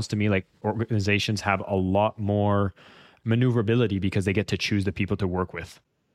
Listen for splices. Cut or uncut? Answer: uncut